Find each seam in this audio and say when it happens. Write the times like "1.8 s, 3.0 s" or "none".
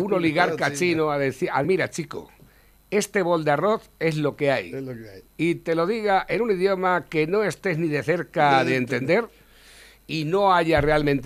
1.6 s